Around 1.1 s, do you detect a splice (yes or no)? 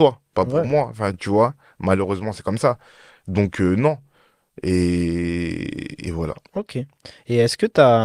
no